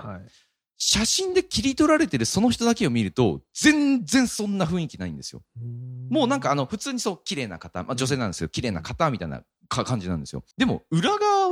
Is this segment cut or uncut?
cut